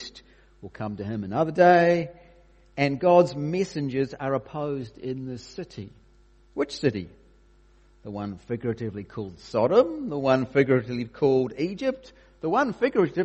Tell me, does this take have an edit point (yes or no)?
no